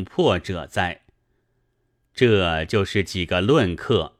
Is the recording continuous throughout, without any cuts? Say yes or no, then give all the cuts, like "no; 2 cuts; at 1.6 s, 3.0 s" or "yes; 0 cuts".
yes; 0 cuts